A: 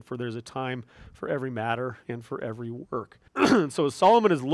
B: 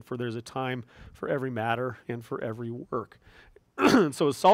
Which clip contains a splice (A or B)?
A